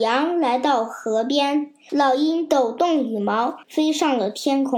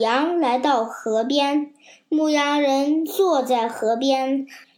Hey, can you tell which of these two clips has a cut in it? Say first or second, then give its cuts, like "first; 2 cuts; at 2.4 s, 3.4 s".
first; 2 cuts; at 1.9 s, 3.6 s